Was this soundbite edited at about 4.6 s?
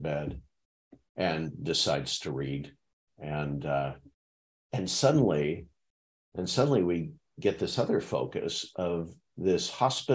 no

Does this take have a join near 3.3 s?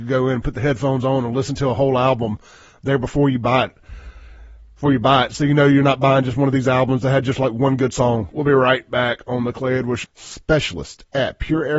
no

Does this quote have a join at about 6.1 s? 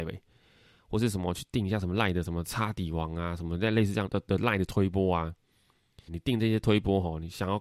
yes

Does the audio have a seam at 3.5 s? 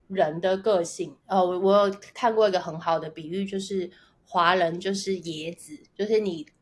no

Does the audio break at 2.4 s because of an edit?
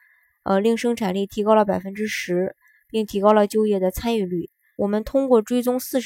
no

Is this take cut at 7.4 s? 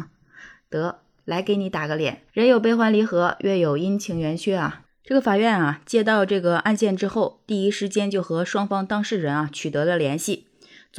no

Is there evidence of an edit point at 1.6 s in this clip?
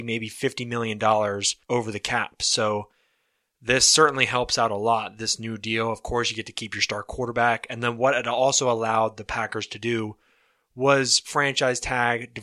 yes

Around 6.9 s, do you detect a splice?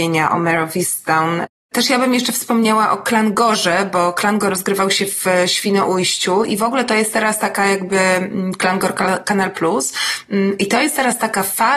no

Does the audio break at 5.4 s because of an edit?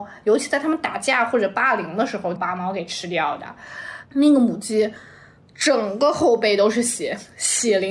no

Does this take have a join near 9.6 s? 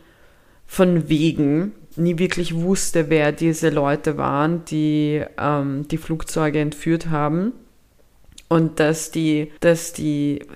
yes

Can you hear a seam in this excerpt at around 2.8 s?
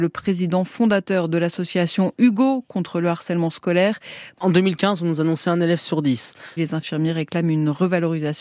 no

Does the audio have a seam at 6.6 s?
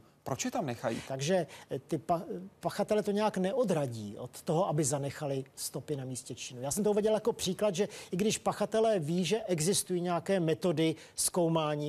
no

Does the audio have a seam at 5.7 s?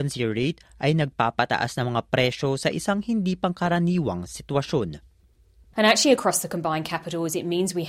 yes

